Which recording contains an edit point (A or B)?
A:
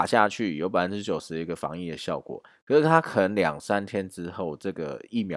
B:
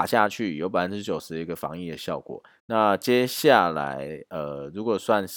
B